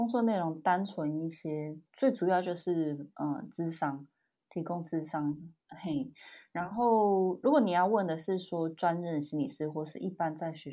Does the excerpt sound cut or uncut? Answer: uncut